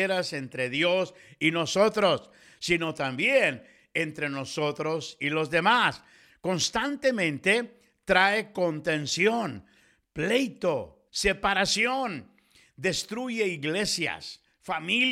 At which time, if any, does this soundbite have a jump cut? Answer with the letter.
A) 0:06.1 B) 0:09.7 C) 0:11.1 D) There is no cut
C